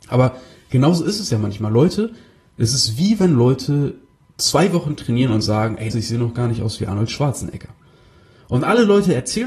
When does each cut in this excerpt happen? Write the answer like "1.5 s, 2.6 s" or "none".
5.9 s